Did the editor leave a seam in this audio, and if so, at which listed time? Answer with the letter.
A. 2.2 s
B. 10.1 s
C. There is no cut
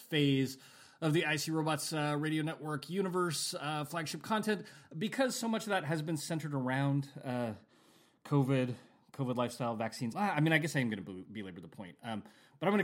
B